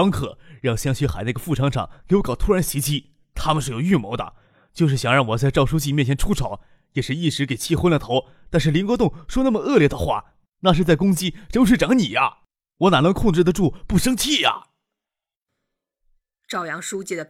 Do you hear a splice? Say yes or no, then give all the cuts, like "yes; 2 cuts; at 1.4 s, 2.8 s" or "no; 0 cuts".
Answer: no; 0 cuts